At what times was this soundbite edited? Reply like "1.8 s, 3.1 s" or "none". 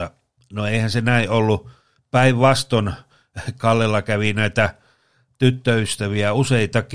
none